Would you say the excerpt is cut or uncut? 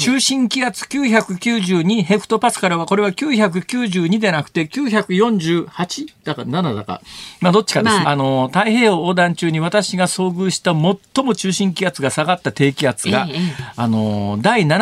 cut